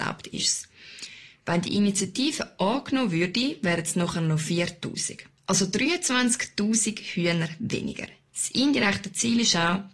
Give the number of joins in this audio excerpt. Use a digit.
1